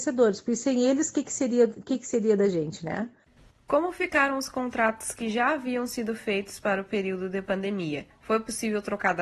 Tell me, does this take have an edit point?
no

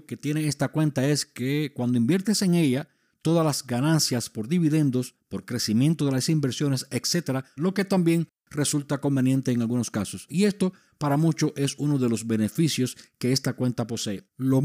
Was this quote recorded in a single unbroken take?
no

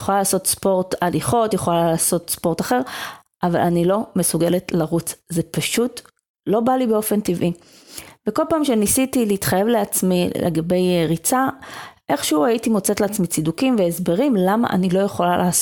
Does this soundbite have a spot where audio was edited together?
no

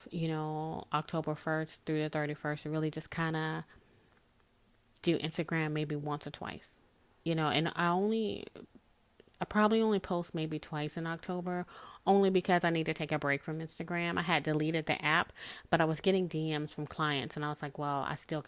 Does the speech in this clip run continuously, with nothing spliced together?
yes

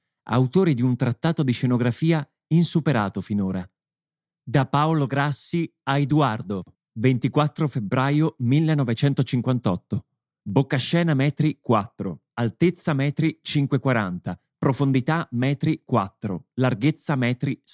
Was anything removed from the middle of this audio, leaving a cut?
yes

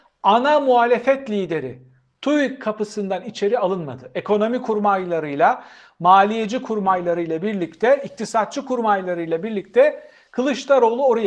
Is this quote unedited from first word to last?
yes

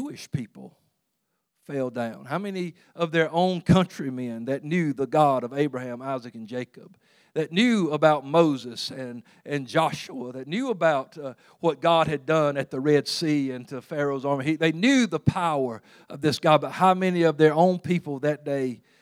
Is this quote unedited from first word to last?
yes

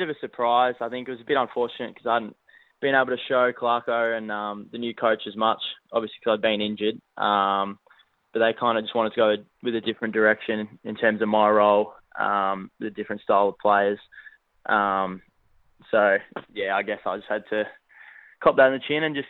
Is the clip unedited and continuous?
yes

